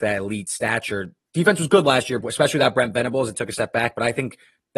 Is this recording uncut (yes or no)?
no